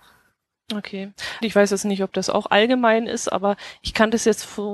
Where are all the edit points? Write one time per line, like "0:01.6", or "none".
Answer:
0:01.4